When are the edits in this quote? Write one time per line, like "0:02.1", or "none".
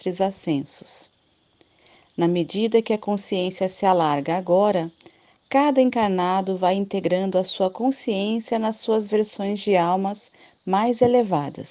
none

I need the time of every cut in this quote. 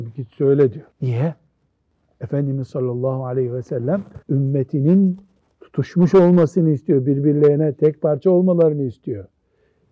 0:00.9
0:04.2

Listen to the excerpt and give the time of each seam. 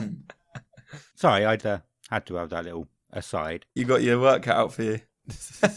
0:01.6
0:03.8

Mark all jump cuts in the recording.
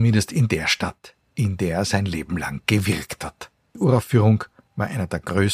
0:03.7

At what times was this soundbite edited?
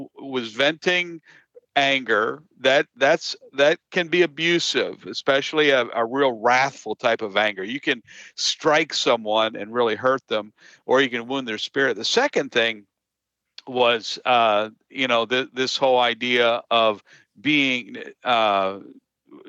none

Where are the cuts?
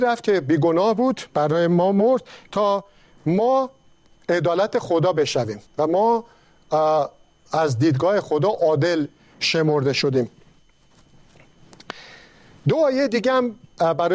0:05.7

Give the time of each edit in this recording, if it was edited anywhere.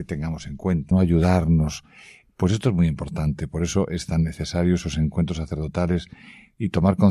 0:00.9

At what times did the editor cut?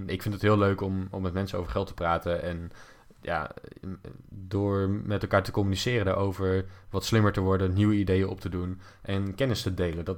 none

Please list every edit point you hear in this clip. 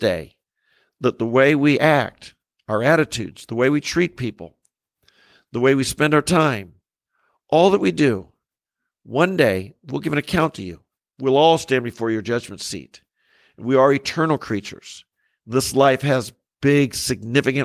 none

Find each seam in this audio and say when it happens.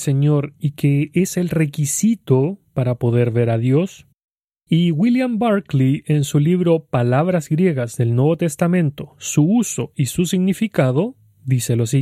0:04.5

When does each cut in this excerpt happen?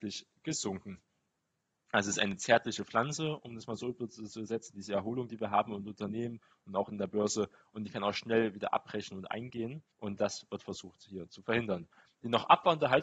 0:09.9

